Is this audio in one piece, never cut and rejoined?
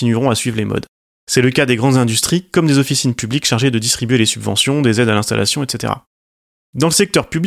no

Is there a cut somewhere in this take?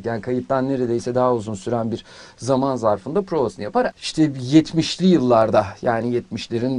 yes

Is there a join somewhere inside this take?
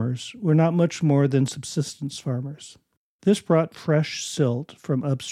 yes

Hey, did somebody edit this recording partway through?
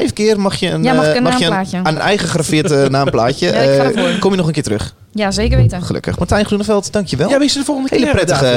no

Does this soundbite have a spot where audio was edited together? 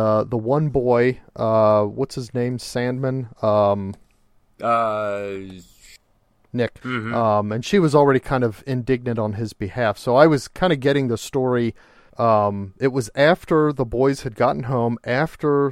yes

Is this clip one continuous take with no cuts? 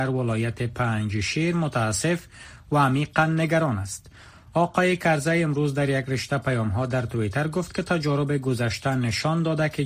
yes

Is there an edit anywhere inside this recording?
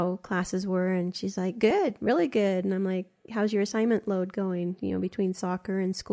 no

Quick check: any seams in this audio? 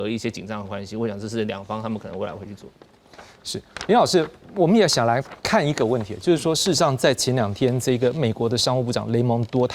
no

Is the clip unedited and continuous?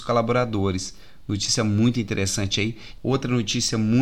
no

